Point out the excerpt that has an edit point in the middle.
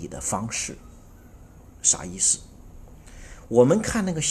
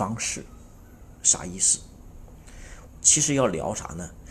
second; 2 cuts; at 1.2 s, 2.9 s

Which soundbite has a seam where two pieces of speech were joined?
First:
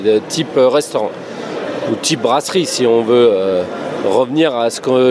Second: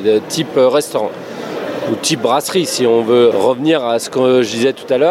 second; 1 cut; at 3.3 s

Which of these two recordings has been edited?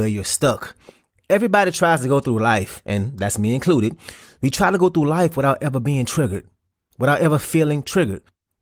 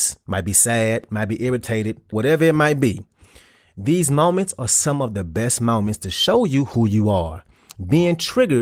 second; 1 cut; at 2.1 s

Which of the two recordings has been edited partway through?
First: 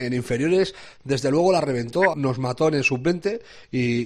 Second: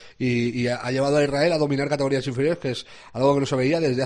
first; 1 cut; at 2.1 s

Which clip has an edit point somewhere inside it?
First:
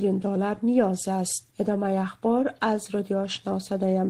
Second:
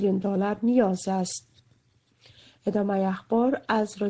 first; 1 cut; at 1.5 s

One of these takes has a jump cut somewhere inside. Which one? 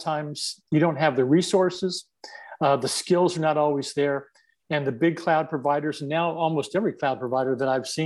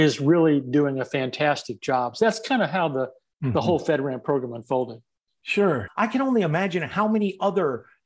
second; 1 cut; at 5.9 s

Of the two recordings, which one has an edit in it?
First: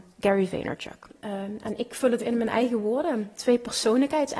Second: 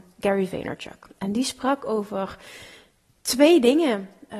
first; 2 cuts; at 1.1 s, 2.2 s

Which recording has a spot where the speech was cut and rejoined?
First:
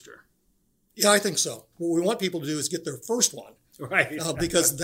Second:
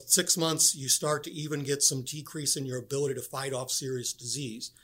first; 1 cut; at 1.7 s

